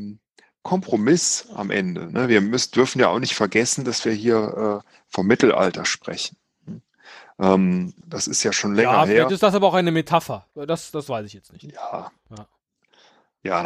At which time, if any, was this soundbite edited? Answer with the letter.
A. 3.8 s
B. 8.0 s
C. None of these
B